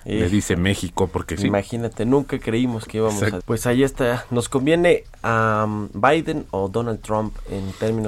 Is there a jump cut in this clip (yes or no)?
yes